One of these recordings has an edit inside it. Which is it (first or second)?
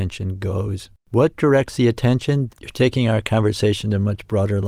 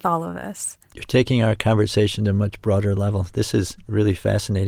first